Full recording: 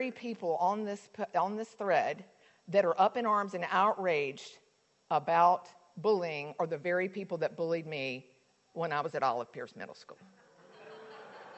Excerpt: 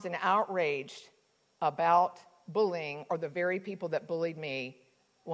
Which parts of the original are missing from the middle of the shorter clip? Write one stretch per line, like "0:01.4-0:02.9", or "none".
none